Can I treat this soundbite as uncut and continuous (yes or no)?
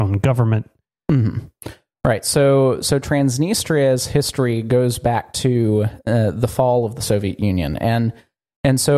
yes